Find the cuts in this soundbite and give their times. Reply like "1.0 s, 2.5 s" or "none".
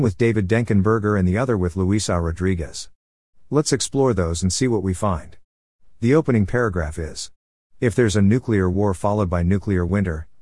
5.9 s